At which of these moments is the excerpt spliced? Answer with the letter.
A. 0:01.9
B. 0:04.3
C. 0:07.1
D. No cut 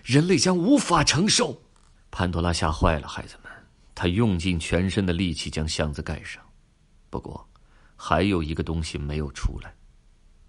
A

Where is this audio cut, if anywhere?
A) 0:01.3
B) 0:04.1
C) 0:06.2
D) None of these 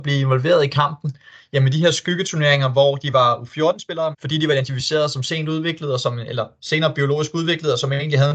B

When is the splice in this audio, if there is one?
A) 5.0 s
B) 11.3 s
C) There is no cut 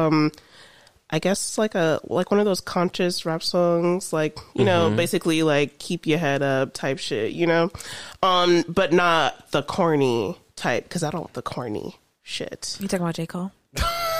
B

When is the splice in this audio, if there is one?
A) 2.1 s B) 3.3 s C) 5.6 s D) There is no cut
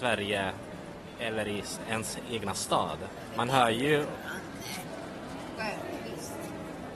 C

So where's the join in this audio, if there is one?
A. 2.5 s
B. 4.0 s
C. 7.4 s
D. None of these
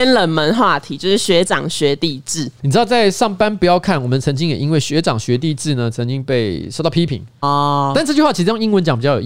C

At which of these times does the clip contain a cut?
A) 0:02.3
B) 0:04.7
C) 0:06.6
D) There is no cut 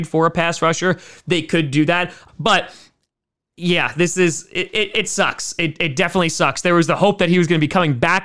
A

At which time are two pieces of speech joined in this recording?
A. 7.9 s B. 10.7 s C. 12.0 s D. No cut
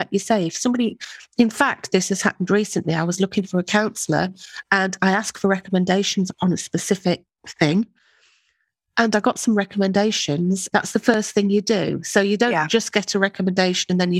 B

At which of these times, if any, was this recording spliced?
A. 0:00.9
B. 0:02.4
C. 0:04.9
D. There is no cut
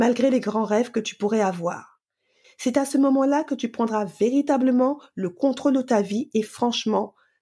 B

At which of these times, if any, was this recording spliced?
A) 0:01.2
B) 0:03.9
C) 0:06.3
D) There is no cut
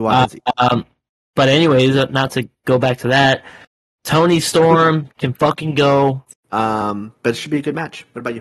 C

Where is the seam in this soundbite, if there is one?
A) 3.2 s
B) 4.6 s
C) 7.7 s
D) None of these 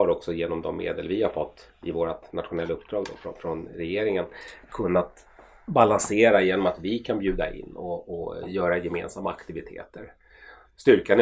B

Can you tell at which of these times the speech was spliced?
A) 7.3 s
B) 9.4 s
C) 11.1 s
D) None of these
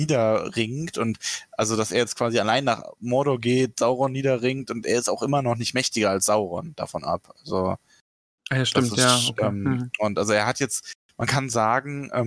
D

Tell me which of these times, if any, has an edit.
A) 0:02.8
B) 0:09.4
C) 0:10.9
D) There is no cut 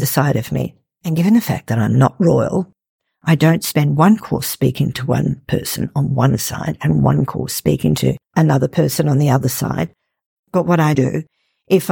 C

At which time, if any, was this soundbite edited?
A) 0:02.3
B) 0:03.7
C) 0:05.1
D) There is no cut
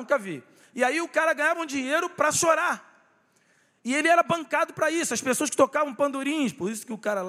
A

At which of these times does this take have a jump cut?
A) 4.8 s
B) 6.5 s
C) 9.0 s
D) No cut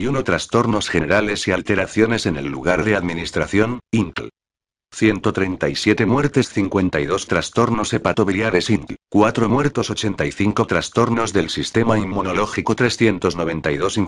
C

